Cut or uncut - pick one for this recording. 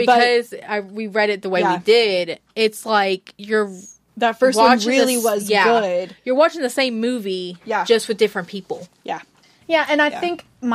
uncut